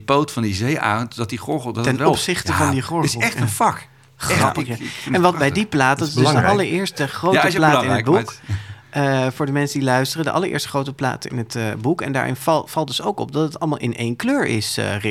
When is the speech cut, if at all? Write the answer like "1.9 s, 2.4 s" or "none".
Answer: none